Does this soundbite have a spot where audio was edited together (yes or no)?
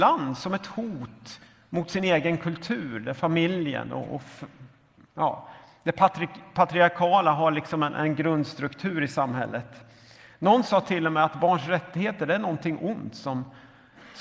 no